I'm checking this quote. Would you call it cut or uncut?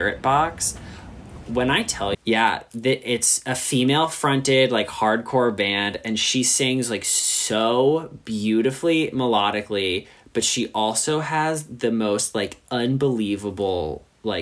cut